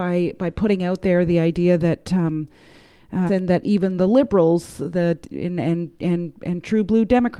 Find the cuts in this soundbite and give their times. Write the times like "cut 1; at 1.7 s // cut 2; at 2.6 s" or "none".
cut 1; at 3.3 s